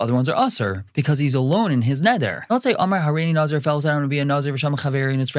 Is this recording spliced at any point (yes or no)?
no